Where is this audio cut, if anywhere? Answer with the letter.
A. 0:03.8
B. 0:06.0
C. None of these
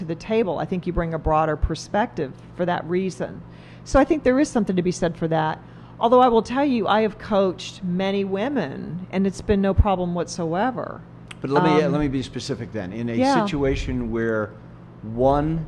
C